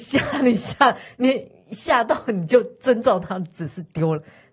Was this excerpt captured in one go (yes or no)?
yes